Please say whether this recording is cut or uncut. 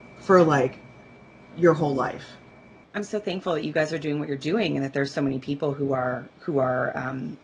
uncut